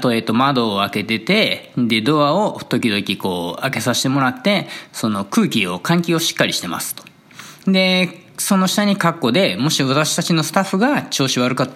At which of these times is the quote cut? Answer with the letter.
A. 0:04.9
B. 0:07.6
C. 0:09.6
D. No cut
B